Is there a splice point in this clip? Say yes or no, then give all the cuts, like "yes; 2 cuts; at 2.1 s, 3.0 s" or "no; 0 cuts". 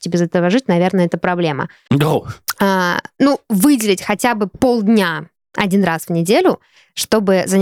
yes; 1 cut; at 1.9 s